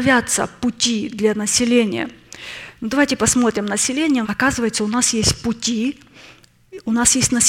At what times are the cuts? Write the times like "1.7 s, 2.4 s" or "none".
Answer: 4.2 s